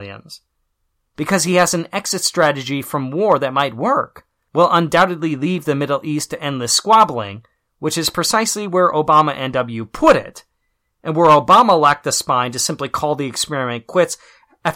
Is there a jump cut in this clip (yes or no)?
yes